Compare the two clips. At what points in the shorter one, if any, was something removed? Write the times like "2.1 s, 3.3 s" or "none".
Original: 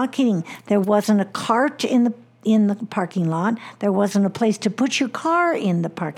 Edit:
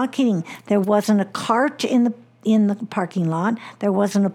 none